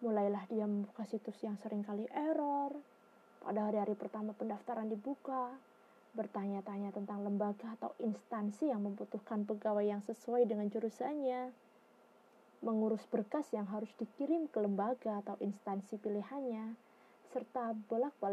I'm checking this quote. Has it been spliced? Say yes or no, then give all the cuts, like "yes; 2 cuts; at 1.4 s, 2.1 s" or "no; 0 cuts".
no; 0 cuts